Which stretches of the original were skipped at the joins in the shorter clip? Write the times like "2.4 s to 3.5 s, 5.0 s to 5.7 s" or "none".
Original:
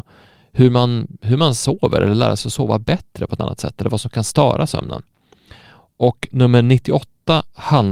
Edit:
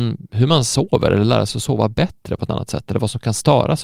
none